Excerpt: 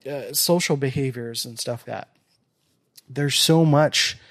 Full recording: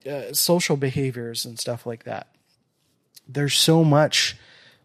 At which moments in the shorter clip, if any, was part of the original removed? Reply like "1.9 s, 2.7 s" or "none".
1.8 s